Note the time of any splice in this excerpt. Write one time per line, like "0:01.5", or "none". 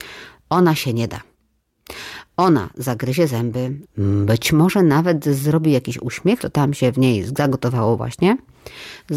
0:03.8
0:06.4